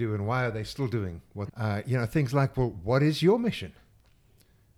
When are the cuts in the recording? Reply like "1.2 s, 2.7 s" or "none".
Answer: 1.5 s